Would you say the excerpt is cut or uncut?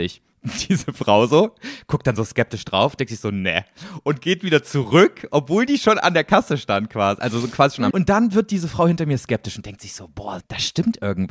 cut